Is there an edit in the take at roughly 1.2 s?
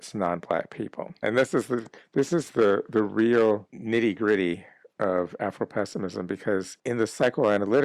yes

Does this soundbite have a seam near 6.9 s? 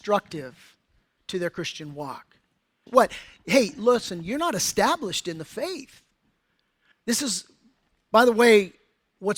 yes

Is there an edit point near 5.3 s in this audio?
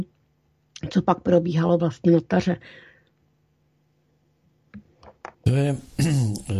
yes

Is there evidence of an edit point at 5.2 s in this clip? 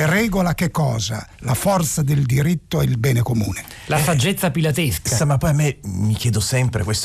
yes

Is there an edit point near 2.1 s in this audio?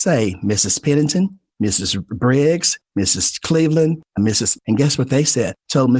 no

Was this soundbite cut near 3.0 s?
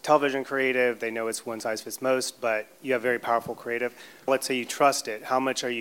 no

